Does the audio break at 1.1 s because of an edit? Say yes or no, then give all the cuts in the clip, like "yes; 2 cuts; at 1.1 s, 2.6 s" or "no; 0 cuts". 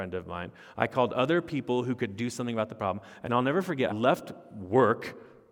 no; 1 cut; at 3.9 s